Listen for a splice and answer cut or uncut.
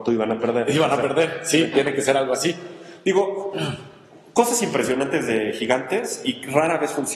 uncut